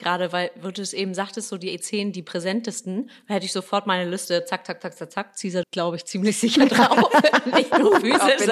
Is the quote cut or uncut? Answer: cut